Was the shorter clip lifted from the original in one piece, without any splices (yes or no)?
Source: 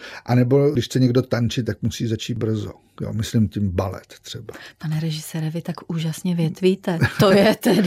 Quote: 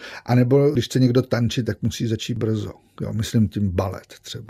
yes